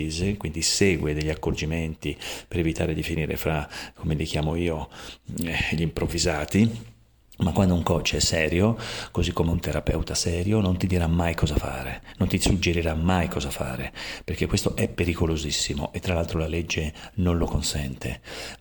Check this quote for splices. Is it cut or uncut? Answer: uncut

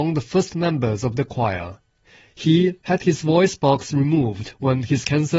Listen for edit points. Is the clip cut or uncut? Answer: cut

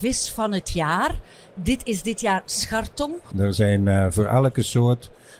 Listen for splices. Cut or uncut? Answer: cut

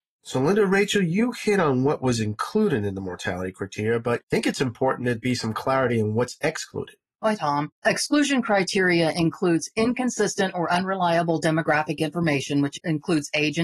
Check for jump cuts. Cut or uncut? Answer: cut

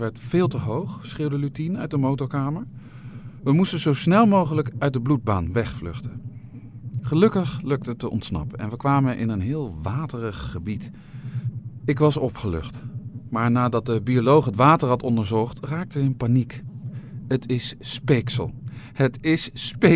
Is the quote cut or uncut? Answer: uncut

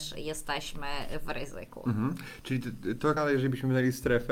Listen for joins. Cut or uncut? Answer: cut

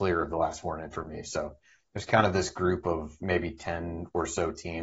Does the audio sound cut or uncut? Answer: uncut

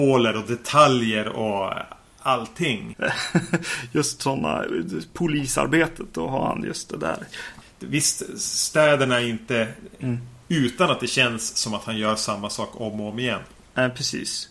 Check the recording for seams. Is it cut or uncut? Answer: cut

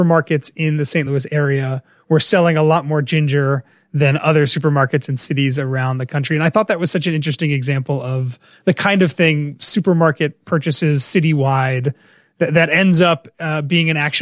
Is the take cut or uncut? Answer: uncut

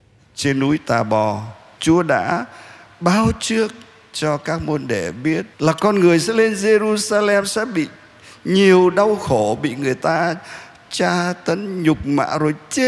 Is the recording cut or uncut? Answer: cut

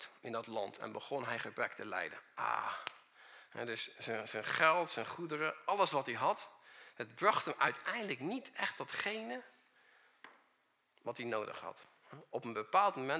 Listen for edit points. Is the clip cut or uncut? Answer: uncut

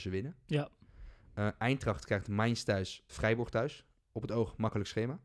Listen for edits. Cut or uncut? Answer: cut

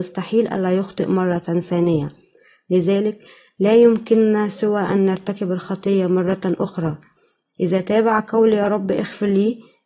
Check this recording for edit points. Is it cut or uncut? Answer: uncut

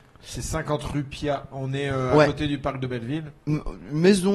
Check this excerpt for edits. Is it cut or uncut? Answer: uncut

